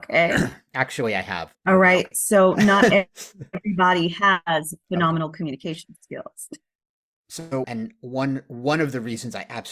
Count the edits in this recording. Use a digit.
2